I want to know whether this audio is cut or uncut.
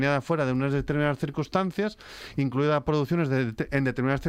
uncut